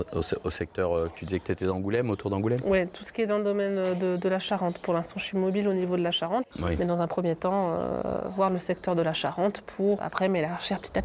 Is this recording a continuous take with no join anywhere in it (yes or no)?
no